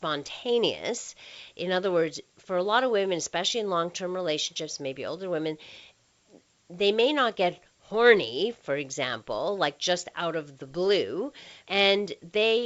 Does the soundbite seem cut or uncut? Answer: cut